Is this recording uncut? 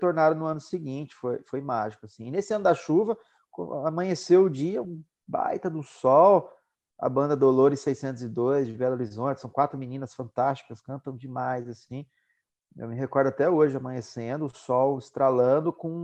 yes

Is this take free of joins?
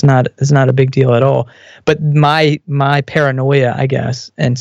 yes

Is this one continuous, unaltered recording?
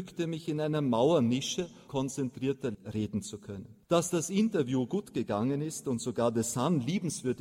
no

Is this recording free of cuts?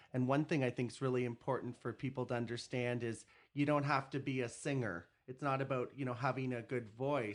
yes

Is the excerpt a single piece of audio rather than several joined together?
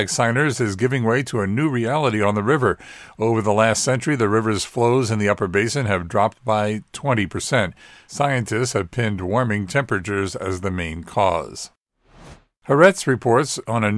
yes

